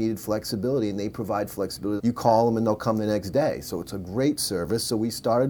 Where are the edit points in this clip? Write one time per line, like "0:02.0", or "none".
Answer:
0:02.0

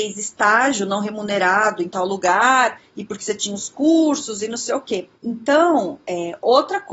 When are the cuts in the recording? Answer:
0:05.1

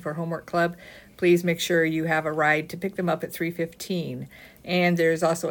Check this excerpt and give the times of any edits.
0:04.6

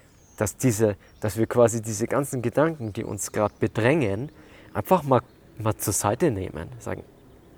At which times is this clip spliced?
none

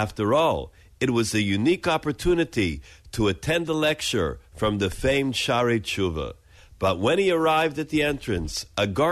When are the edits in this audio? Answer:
0:06.6

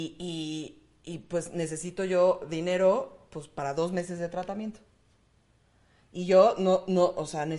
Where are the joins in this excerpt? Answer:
none

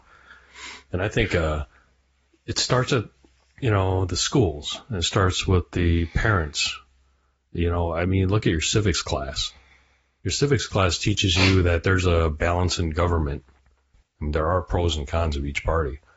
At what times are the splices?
0:14.0

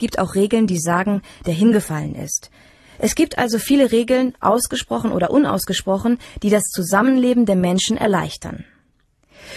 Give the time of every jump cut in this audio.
0:01.4

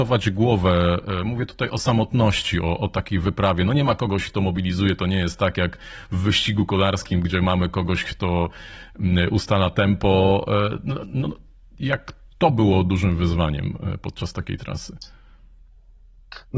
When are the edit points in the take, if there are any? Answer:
0:07.2

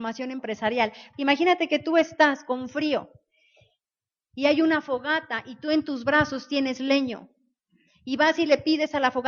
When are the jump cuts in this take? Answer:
0:01.1

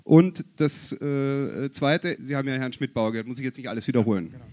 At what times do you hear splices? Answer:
0:02.2

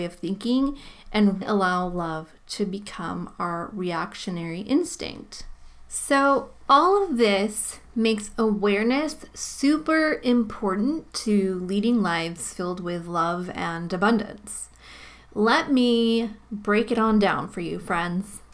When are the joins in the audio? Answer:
0:01.4

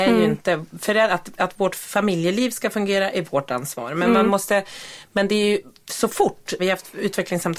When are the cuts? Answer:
0:06.6

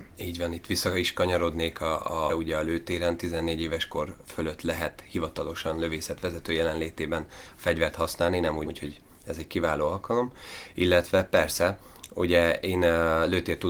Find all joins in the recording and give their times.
0:02.3
0:08.6

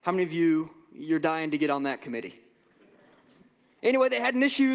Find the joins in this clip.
0:03.8

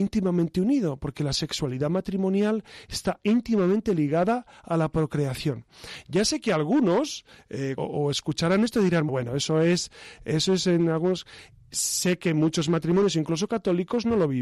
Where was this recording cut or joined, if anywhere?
0:07.8
0:09.1

